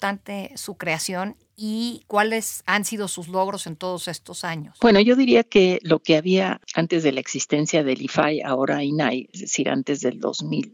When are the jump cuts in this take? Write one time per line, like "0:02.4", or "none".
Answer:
none